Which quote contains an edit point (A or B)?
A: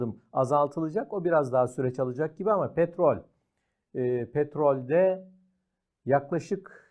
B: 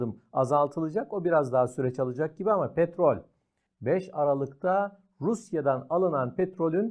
B